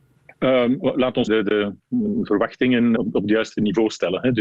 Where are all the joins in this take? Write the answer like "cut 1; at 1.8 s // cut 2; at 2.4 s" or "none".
cut 1; at 1.3 s // cut 2; at 3.0 s